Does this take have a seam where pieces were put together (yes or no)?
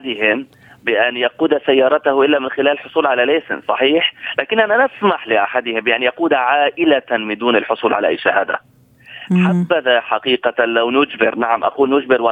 no